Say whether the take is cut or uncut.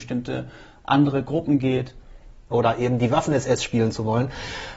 cut